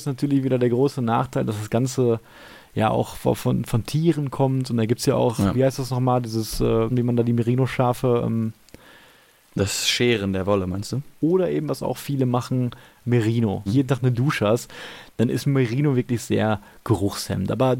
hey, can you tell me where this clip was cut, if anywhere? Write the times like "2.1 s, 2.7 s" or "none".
6.9 s, 11.2 s, 13.7 s